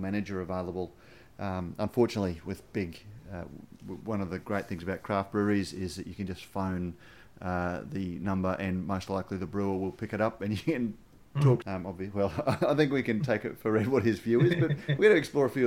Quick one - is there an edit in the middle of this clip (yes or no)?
yes